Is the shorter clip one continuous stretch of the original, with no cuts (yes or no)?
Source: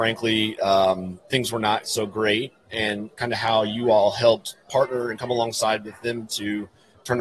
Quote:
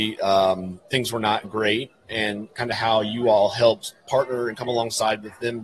no